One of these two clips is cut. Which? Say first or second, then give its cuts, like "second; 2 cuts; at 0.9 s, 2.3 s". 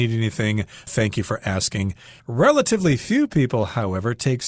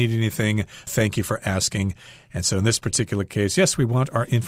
first; 1 cut; at 2.2 s